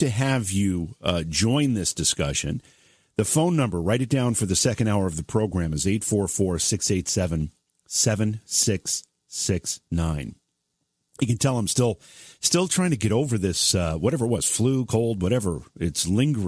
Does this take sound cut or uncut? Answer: uncut